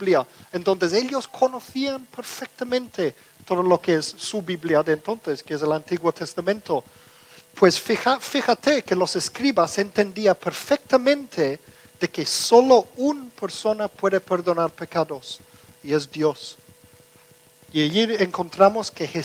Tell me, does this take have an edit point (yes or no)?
no